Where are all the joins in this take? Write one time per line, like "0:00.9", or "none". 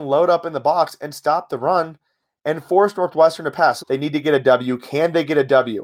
0:03.8